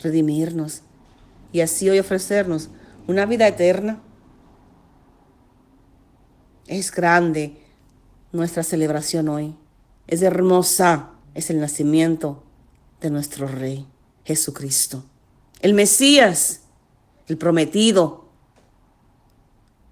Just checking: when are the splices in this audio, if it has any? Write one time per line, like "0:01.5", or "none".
0:11.2